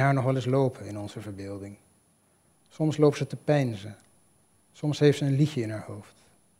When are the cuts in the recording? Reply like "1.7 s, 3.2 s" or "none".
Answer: none